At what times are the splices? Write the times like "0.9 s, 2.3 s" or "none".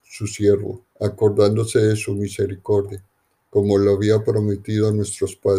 0.9 s